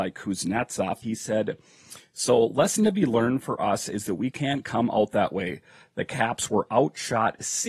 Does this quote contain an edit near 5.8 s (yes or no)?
no